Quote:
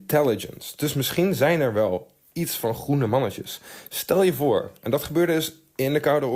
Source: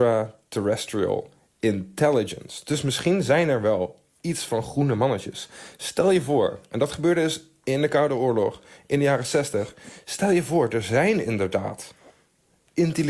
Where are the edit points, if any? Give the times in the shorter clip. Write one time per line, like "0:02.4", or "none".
none